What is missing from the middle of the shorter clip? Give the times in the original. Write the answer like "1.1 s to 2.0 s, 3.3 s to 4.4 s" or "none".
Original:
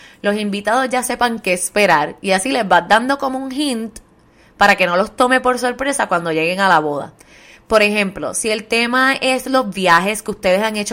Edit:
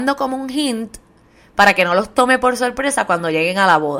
none

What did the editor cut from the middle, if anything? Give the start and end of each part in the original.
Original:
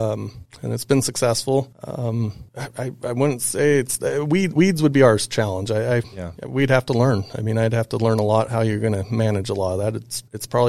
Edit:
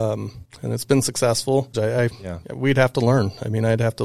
1.7 s to 5.7 s

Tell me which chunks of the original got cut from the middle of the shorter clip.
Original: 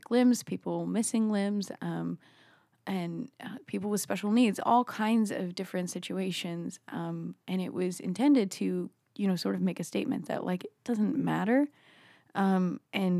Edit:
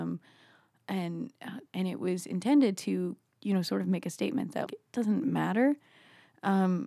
3.6 s to 7.4 s, 10.4 s to 10.6 s

